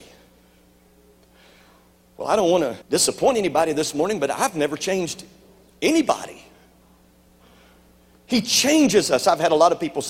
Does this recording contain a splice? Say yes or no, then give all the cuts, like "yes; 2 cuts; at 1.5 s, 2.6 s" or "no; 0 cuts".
yes; 2 cuts; at 2.8 s, 8.2 s